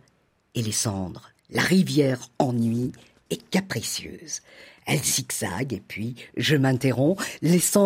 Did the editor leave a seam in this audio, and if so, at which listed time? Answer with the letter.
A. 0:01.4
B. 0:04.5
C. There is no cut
A